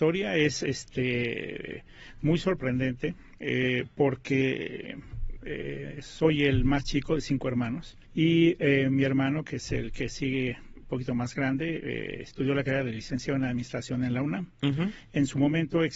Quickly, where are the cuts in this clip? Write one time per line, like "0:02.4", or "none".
0:08.0